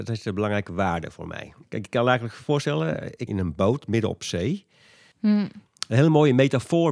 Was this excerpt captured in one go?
no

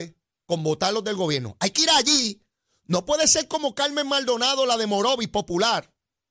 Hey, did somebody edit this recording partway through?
no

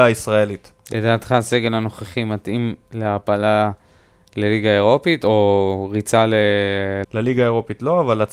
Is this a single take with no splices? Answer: no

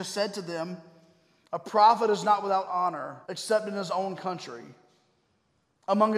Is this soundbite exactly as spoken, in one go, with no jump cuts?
no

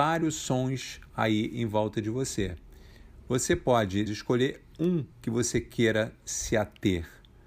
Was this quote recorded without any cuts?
no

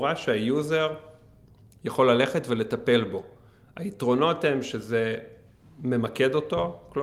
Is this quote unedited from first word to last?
yes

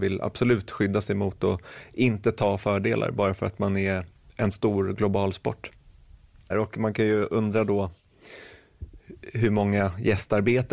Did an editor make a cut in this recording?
yes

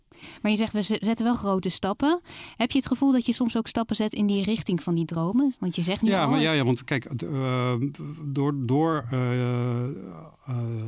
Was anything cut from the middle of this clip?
no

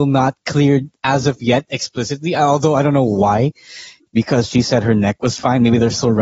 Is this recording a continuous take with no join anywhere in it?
yes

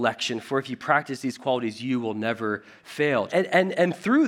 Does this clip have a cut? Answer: yes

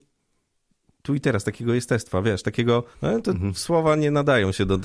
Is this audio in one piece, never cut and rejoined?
no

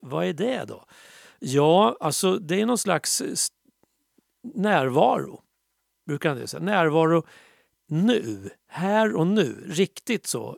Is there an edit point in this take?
no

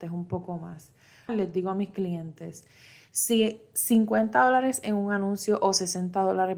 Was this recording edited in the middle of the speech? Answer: yes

